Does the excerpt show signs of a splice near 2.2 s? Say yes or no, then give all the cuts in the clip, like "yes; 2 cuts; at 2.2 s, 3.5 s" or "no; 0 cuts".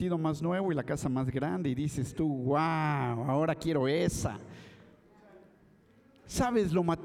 no; 0 cuts